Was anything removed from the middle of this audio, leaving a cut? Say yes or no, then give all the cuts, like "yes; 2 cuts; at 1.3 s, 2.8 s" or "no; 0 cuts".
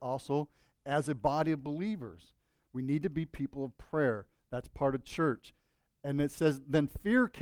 no; 0 cuts